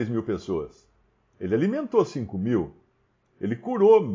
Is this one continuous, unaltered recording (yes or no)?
yes